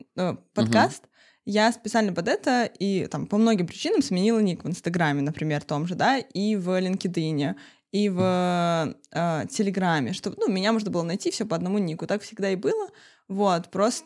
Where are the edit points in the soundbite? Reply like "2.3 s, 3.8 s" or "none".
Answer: none